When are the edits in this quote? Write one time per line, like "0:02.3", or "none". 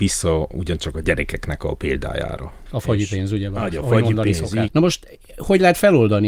0:02.7
0:04.7